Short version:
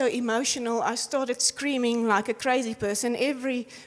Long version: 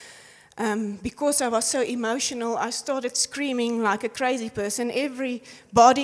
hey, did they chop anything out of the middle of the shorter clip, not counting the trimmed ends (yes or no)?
no